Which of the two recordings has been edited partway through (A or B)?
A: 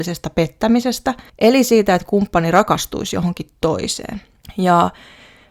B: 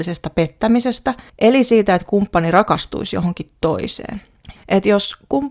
B